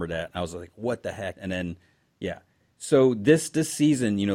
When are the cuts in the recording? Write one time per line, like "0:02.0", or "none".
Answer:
0:01.4